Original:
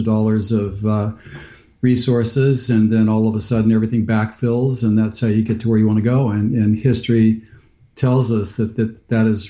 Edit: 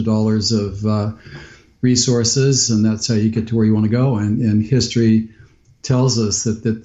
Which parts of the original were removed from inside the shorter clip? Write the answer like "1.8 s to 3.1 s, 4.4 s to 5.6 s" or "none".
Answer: 2.7 s to 4.8 s